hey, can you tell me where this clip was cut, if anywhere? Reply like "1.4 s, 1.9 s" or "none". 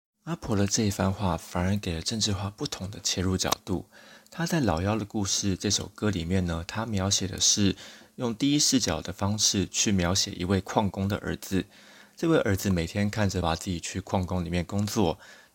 13.4 s